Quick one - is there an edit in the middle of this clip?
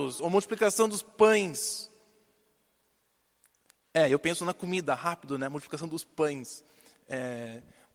no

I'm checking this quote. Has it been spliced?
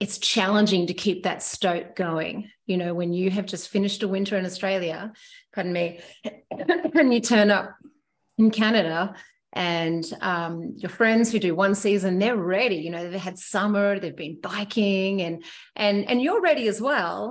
no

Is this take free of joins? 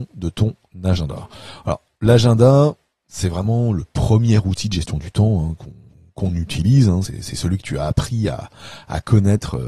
yes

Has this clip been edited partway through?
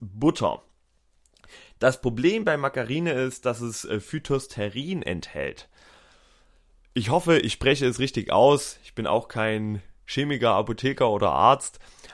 no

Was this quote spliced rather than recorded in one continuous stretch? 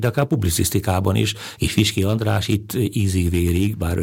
yes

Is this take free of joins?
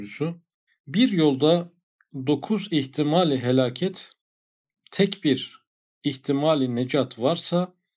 yes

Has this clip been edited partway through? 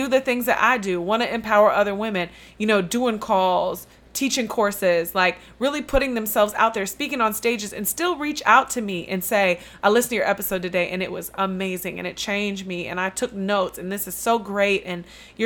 no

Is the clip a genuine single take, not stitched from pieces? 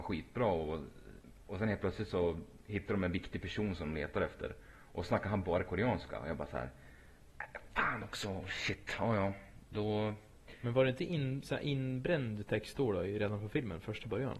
yes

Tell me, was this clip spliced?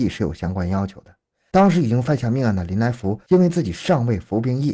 no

